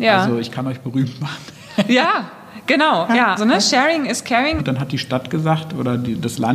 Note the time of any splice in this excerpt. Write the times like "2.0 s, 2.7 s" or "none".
3.4 s, 4.6 s